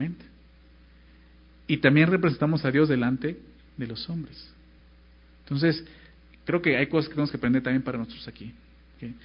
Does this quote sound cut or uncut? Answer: uncut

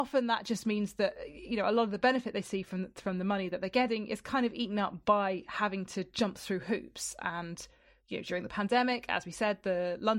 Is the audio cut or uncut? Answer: uncut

